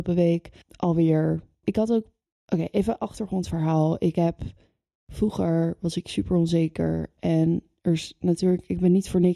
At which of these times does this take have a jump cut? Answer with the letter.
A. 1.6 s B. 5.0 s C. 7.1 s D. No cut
A